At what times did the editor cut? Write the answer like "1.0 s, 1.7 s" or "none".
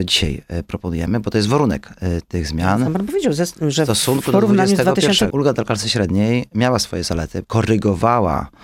5.3 s, 7.4 s